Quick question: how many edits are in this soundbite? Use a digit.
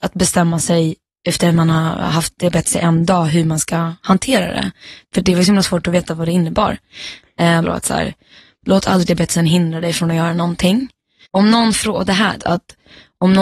3